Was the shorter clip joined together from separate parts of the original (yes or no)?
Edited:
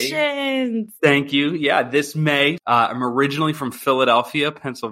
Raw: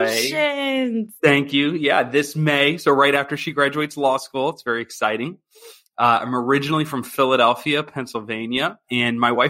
yes